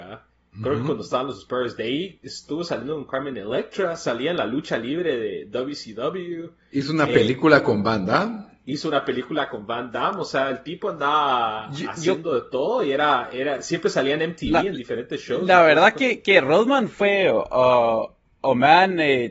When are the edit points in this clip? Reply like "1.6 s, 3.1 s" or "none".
none